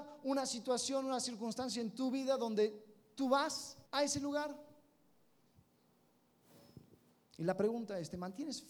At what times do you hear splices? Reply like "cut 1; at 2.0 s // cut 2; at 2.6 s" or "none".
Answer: cut 1; at 3.9 s